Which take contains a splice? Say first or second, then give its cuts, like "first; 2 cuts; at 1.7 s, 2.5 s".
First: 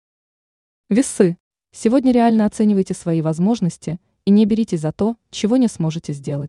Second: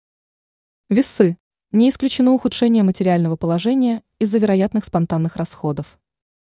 second; 1 cut; at 1.5 s